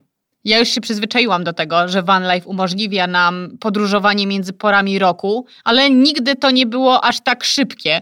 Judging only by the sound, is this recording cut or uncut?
uncut